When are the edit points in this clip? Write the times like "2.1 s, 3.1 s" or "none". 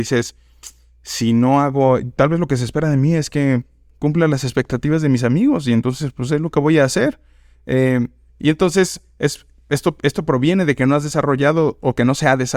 none